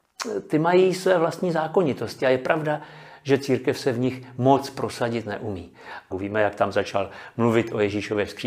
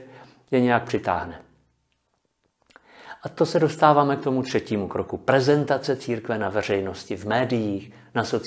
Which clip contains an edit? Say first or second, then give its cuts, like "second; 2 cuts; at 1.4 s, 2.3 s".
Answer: first; 1 cut; at 6.1 s